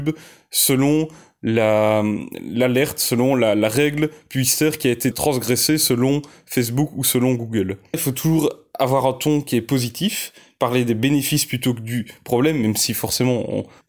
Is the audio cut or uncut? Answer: cut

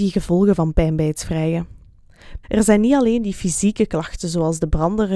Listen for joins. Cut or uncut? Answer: cut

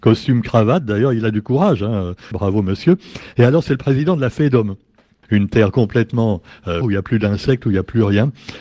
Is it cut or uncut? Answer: cut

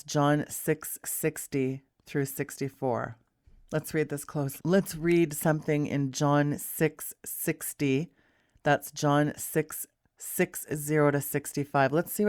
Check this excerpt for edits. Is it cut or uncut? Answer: cut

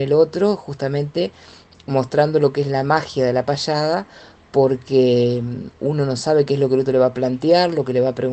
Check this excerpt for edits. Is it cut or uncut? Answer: uncut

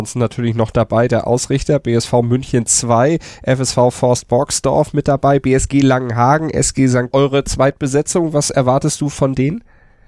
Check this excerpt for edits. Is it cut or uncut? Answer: cut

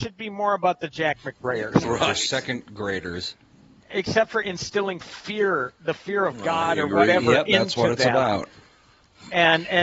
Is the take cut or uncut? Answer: cut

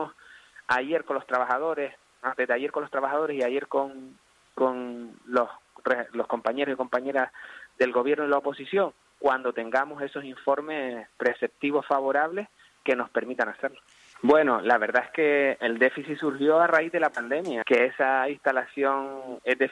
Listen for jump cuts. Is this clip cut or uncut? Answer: cut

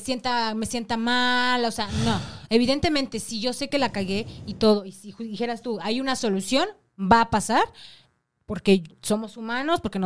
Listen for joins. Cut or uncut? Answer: uncut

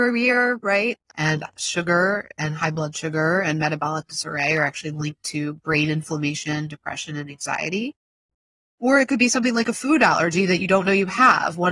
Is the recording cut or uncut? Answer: uncut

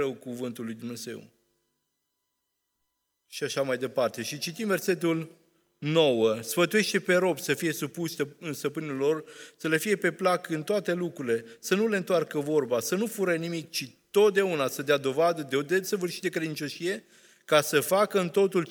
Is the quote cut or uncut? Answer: uncut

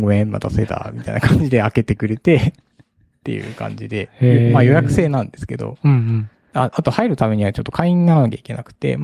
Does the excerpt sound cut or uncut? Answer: cut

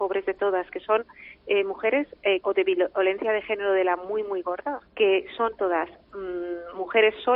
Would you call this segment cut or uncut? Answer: cut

